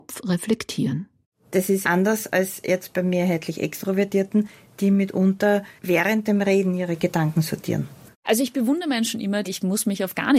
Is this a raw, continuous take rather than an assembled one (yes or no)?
no